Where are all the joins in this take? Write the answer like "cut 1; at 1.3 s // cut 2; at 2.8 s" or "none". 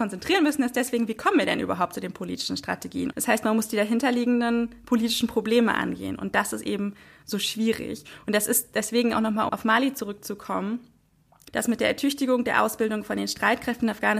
cut 1; at 3.1 s // cut 2; at 9.5 s // cut 3; at 11.5 s